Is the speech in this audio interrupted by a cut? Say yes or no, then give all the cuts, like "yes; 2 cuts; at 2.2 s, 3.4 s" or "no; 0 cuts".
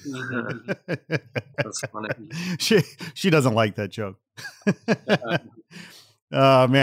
no; 0 cuts